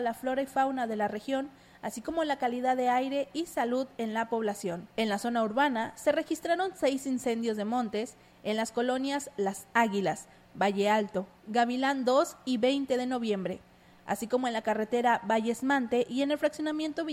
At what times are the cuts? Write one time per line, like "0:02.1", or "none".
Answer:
0:04.9